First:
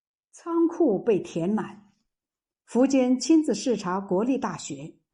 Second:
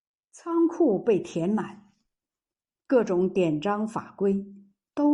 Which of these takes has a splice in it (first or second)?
first